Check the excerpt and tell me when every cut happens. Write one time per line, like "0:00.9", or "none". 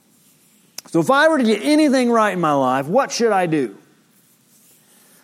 none